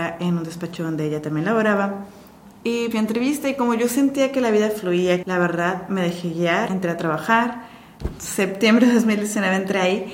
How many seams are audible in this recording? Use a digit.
2